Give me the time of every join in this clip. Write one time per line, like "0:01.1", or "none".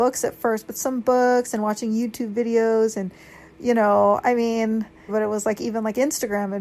0:05.1